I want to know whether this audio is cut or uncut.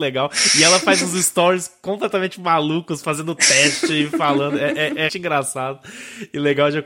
cut